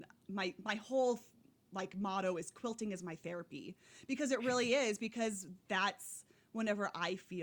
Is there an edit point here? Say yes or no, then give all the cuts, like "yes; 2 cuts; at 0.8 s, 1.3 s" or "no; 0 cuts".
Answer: no; 0 cuts